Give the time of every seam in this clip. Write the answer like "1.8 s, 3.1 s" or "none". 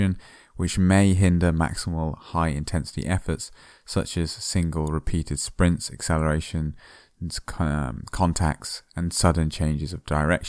none